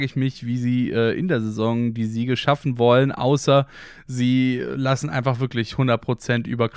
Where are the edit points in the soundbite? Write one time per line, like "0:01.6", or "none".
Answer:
none